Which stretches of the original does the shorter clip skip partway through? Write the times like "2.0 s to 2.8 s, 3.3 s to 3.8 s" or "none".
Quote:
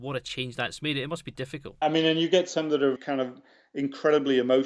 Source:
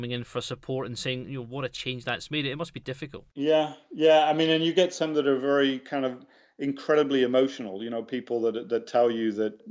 3.3 s to 4.3 s, 5.4 s to 5.8 s